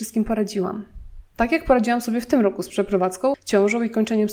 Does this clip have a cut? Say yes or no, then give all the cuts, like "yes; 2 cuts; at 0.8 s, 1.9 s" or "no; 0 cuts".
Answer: no; 0 cuts